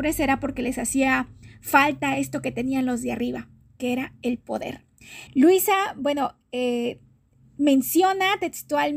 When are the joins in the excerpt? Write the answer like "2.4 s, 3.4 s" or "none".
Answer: 5.3 s